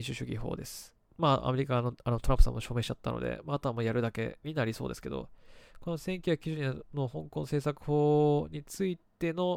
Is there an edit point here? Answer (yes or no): yes